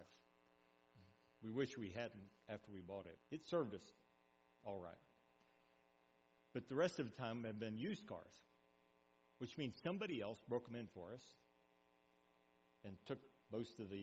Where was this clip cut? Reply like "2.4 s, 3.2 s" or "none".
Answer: 3.2 s